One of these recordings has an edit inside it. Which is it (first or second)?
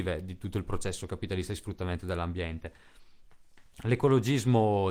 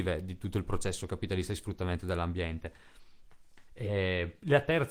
second